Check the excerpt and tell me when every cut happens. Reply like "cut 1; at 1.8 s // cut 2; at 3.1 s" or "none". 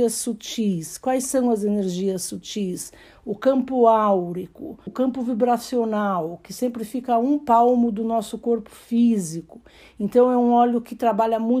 cut 1; at 4.9 s